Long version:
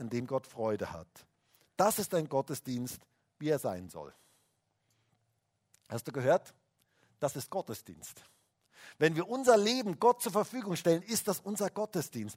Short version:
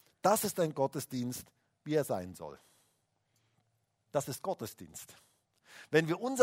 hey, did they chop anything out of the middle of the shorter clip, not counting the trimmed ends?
yes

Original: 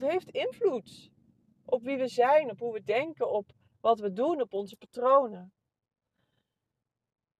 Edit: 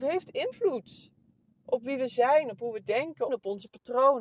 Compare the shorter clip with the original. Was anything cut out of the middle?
yes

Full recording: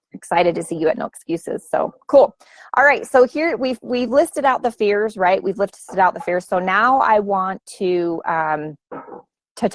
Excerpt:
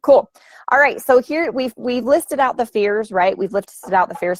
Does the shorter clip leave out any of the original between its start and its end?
no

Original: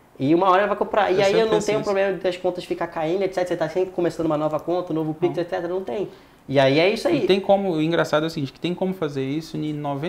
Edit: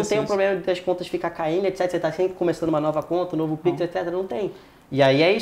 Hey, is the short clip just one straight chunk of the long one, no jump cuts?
yes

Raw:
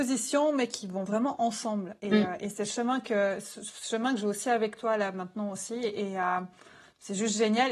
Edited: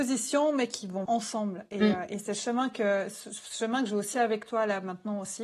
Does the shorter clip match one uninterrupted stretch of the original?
no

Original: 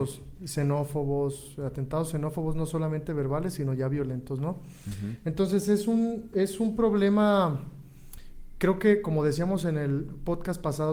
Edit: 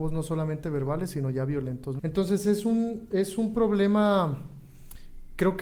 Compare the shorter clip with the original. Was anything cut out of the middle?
yes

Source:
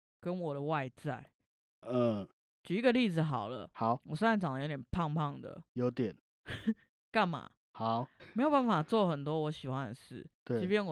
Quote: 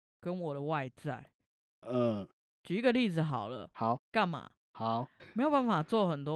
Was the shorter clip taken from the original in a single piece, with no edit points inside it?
no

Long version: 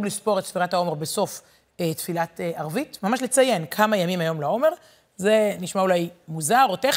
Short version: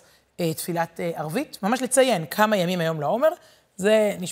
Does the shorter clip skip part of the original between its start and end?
no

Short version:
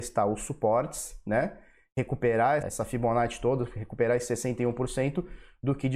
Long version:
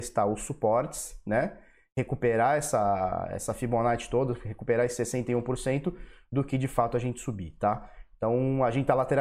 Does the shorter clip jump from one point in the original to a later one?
yes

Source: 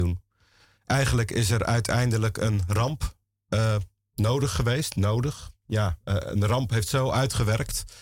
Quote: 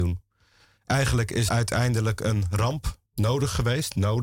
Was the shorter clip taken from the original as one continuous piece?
no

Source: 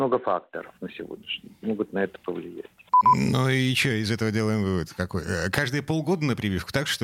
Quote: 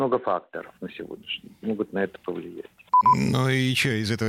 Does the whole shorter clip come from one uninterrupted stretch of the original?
yes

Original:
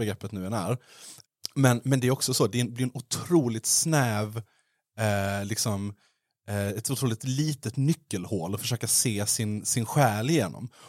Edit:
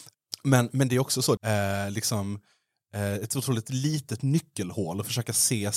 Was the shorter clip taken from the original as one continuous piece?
no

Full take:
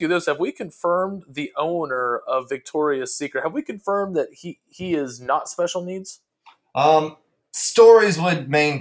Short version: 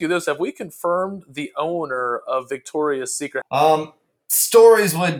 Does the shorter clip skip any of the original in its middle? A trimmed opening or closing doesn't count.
yes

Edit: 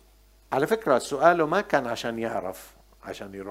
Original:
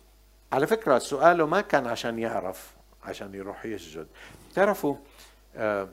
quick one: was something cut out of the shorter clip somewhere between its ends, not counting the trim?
no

